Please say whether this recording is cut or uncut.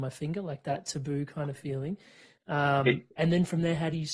uncut